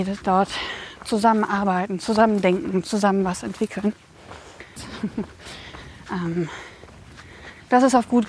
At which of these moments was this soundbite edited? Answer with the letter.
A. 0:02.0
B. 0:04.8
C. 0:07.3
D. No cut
B